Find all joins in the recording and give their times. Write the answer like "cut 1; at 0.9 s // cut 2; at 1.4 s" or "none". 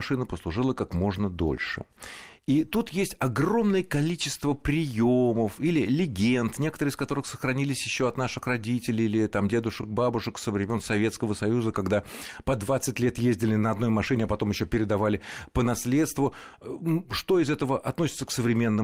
none